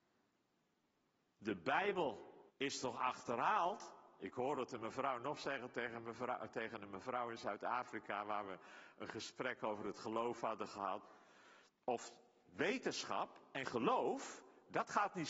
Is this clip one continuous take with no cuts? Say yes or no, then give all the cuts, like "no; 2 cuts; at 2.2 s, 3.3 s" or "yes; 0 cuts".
no; 2 cuts; at 2.5 s, 11.7 s